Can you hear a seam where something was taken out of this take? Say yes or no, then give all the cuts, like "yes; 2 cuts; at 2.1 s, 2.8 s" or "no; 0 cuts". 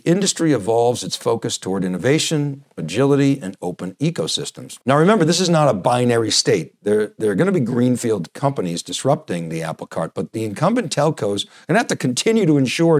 yes; 1 cut; at 4.8 s